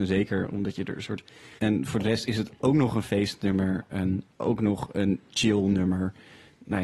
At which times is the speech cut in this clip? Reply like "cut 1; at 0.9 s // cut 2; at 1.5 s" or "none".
cut 1; at 1.6 s // cut 2; at 4.3 s